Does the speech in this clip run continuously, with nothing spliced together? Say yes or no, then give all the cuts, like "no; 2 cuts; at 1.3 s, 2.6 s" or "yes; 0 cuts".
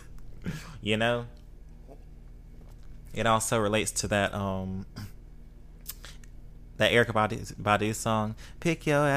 yes; 0 cuts